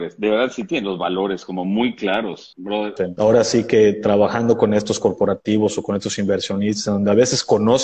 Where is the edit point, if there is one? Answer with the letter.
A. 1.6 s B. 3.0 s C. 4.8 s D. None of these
B